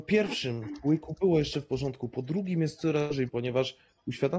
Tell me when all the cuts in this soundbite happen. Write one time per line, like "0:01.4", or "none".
0:03.3